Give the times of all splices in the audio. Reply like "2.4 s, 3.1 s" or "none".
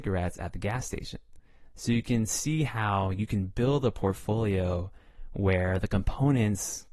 none